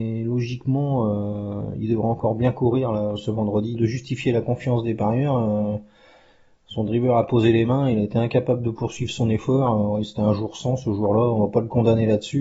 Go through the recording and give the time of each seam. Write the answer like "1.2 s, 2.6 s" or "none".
3.7 s